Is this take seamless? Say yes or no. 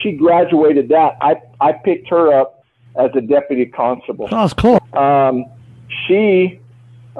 no